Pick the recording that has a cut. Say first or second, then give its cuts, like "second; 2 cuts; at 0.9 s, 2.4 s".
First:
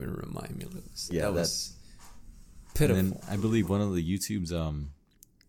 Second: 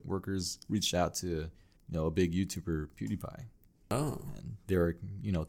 second; 1 cut; at 1.8 s